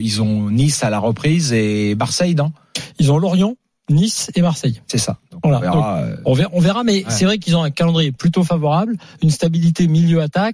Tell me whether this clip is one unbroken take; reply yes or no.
yes